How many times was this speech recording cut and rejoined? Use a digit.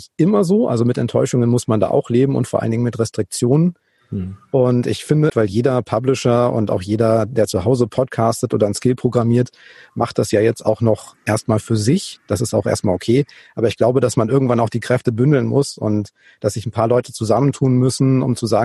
1